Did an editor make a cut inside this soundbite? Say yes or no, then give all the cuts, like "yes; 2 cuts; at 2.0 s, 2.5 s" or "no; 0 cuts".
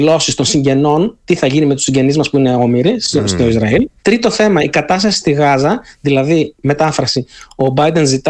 yes; 1 cut; at 4.0 s